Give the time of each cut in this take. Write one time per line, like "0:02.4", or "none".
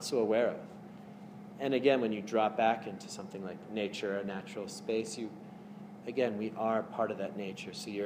0:06.0

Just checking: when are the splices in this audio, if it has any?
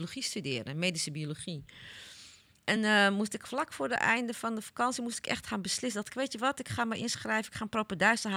none

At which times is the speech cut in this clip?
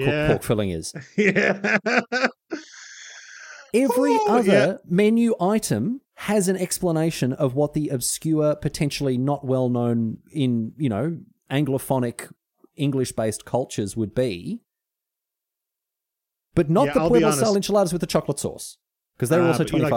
0:19.1

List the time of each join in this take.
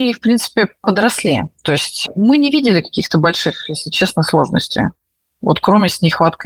none

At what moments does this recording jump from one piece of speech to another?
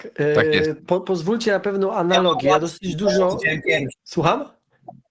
0:04.0

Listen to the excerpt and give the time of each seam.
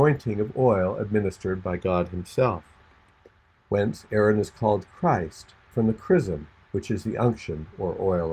0:03.6

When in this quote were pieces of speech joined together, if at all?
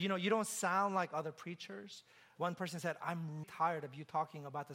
0:02.4
0:03.4

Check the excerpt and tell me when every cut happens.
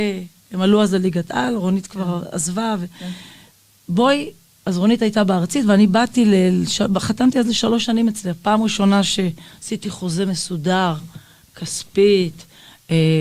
none

